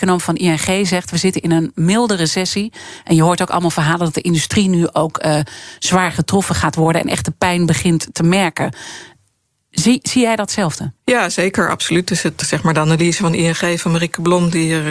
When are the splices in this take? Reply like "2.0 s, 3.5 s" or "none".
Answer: 11.0 s, 12.4 s